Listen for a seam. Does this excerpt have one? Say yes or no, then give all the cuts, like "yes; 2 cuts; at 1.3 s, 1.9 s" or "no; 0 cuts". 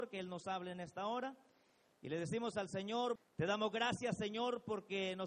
yes; 1 cut; at 3.2 s